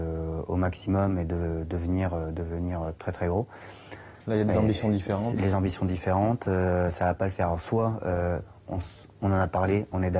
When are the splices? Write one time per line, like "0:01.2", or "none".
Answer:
0:04.2